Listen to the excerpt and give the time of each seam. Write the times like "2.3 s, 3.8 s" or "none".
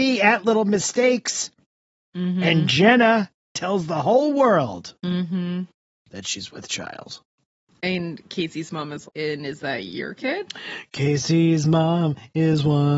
9.1 s